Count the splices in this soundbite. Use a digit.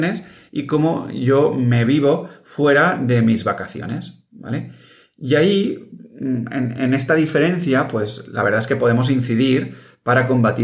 1